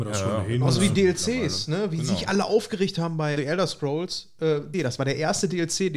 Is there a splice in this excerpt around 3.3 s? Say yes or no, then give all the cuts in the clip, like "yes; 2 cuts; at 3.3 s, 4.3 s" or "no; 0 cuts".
yes; 2 cuts; at 3.3 s, 4.7 s